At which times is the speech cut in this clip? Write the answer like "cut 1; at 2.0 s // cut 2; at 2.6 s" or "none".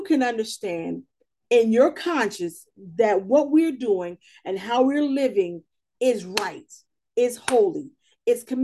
none